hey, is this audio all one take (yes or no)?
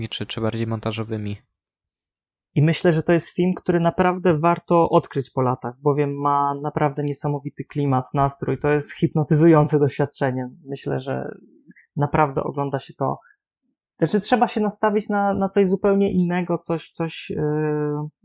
yes